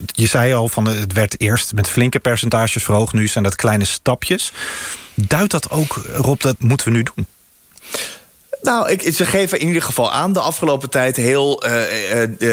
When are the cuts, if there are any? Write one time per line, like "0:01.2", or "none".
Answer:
0:06.6

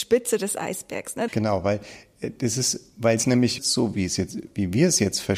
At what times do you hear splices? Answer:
0:01.3
0:03.6

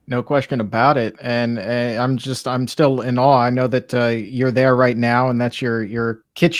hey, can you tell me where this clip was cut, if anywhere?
none

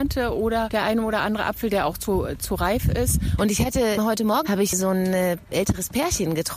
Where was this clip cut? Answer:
0:03.4
0:04.4

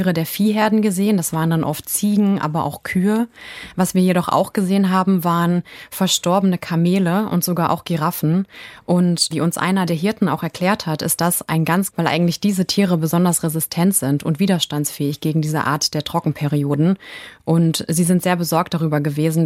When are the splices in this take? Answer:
0:11.9

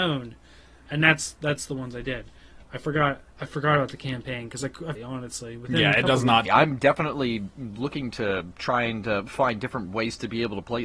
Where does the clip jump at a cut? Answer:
0:05.0
0:06.5

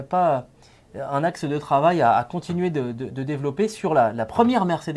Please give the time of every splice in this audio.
none

